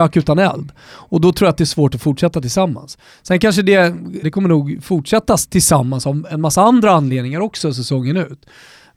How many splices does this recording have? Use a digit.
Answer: 1